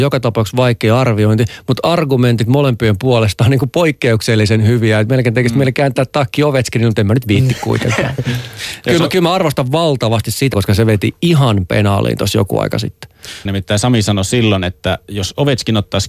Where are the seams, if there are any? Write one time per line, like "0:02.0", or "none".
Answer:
0:10.5
0:13.4